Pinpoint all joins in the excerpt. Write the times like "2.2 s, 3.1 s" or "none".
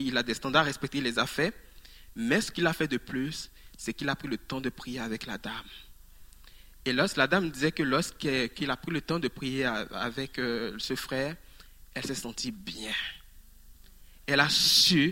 none